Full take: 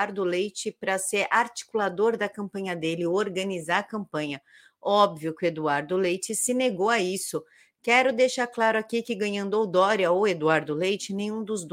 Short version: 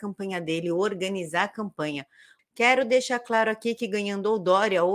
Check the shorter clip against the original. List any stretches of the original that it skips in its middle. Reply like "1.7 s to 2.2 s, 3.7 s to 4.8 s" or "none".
4.7 s to 7.7 s